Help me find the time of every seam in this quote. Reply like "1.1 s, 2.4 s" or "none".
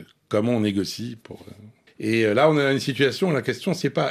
1.9 s